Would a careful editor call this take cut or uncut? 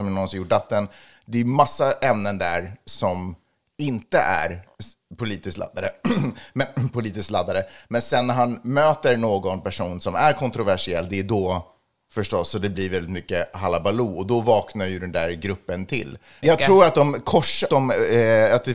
cut